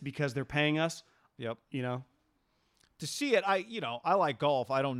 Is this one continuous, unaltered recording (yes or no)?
no